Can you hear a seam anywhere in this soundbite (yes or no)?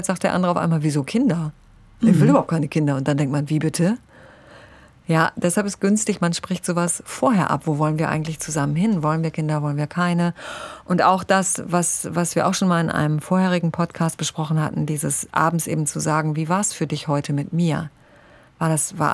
no